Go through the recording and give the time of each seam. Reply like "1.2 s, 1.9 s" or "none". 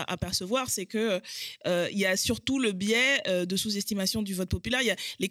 none